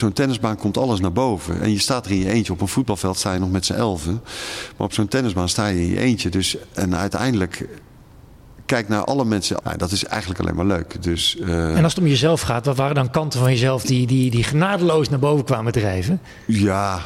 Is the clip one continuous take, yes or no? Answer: no